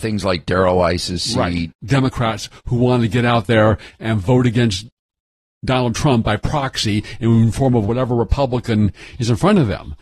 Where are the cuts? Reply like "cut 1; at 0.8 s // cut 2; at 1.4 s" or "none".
cut 1; at 1.8 s